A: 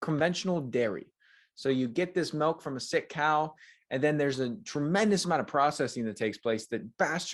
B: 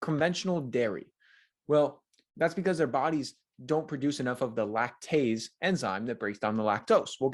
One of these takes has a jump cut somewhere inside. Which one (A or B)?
B